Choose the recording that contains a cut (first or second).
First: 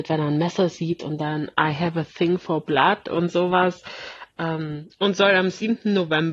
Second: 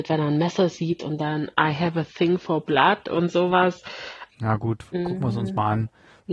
second